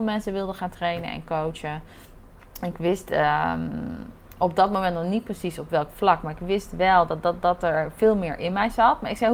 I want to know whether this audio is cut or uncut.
uncut